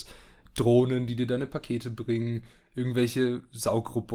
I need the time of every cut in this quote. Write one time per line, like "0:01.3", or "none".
none

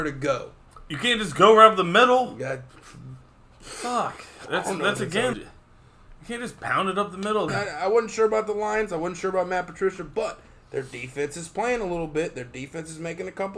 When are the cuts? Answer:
0:05.3
0:07.5

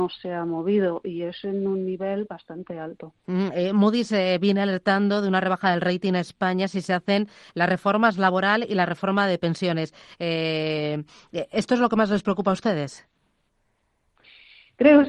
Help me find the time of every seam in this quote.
none

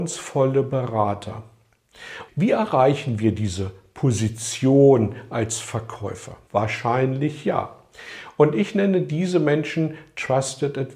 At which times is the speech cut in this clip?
0:02.3
0:06.5

